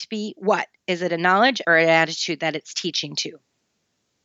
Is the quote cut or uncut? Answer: cut